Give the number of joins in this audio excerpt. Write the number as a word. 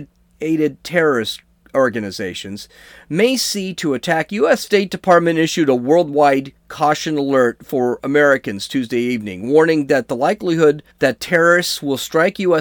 two